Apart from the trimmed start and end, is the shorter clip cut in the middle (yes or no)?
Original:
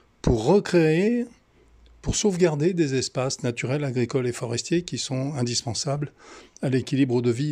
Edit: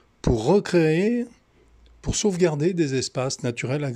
no